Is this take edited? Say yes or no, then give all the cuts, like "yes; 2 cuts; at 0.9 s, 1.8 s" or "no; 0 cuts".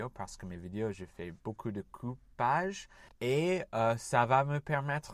yes; 1 cut; at 3.1 s